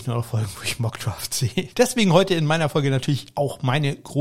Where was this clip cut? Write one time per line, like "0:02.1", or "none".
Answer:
0:01.7

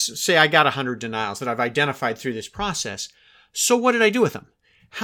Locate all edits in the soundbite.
none

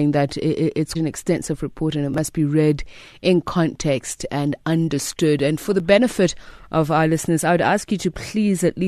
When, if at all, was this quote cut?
0:00.9

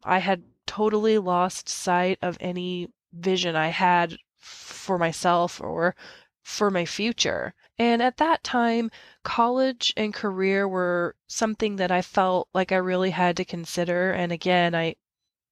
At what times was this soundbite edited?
0:07.7

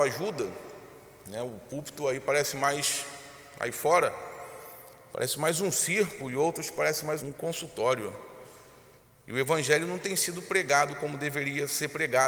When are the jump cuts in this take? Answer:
0:07.2

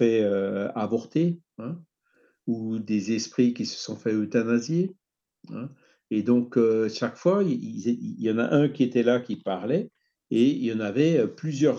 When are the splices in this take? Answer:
none

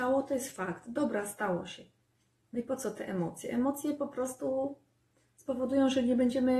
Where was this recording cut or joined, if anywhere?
none

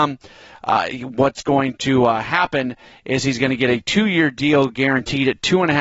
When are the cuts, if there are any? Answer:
none

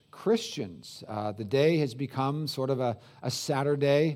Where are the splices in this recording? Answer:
none

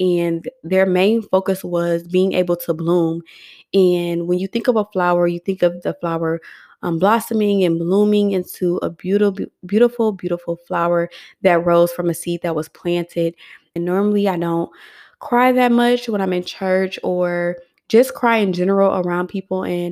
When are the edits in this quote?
0:13.8

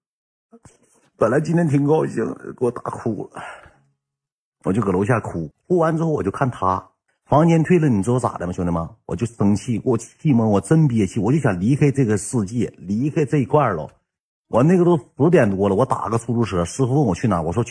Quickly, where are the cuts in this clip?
0:05.5
0:07.1

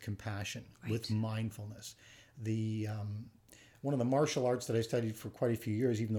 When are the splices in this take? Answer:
none

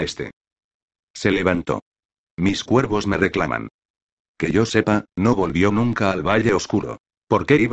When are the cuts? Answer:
0:04.2

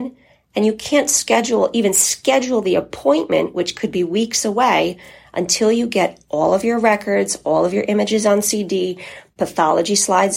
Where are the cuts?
none

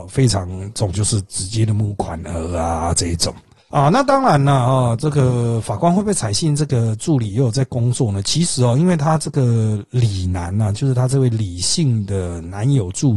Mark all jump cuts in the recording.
none

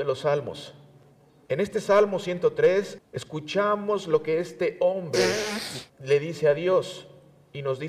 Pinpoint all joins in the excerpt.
0:01.5
0:03.0
0:05.9

